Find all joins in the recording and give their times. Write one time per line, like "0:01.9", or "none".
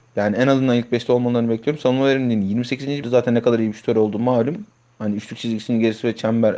0:03.0